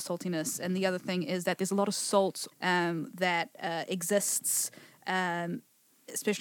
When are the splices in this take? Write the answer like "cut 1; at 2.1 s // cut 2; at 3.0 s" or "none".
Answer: cut 1; at 2.5 s